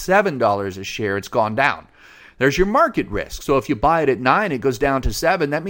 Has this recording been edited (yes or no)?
no